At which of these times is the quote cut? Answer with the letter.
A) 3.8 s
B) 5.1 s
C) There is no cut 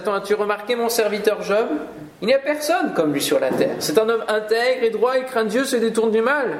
C